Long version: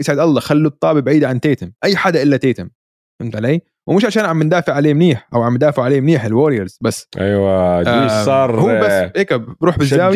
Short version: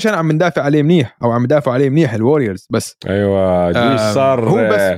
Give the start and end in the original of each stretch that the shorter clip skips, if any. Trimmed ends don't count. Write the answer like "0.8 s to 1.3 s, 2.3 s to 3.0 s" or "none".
none

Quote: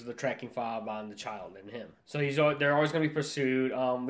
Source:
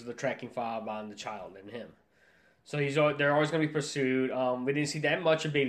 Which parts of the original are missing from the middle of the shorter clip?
2.0 s to 2.6 s

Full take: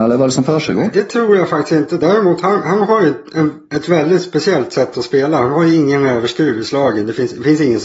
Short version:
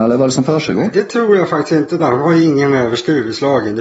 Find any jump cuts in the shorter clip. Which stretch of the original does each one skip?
2.0 s to 5.3 s

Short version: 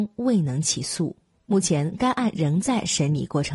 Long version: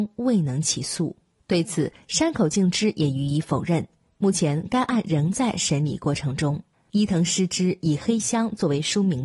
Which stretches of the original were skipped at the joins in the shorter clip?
1.3 s to 4.0 s

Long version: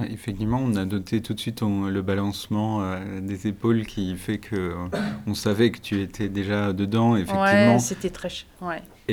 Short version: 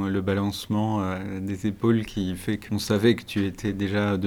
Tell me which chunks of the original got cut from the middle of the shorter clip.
4.5 s to 5.2 s

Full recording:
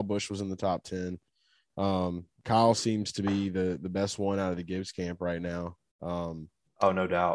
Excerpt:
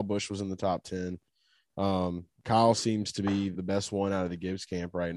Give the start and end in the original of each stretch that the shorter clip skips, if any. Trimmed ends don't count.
3.5 s to 3.8 s

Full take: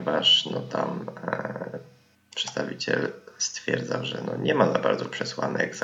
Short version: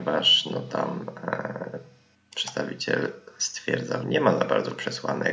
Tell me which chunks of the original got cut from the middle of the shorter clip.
4.0 s to 4.4 s

